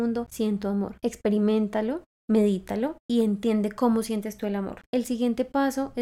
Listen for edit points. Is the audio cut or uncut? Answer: cut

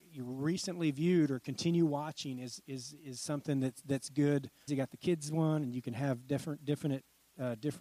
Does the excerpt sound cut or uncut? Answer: cut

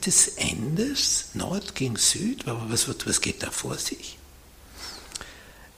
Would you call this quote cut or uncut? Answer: uncut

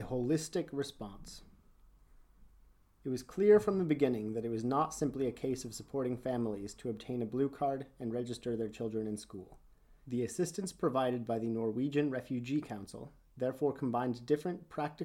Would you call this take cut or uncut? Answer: cut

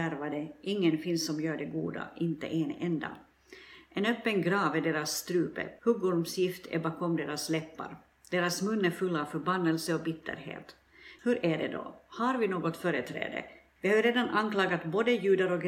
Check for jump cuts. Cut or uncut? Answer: cut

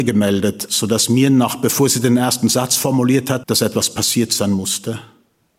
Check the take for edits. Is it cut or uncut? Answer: cut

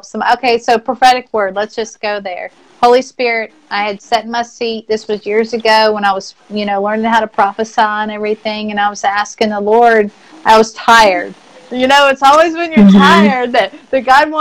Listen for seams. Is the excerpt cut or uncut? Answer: uncut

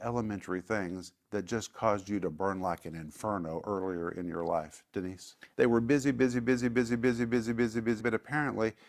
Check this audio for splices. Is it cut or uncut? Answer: cut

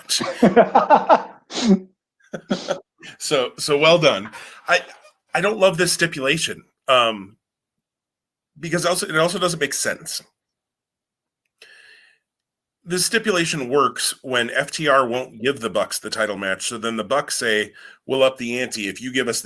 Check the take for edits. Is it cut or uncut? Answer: uncut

